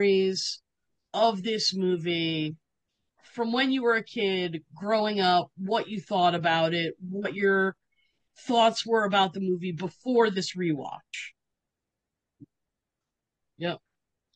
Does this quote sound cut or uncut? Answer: cut